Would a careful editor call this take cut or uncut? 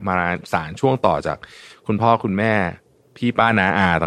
uncut